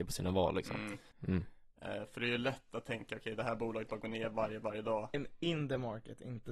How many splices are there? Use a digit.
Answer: 2